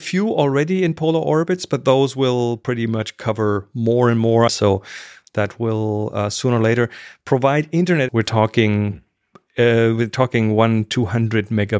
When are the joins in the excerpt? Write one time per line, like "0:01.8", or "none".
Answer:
0:04.5
0:08.1